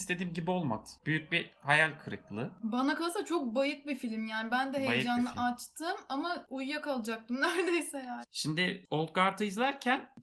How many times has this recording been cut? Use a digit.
1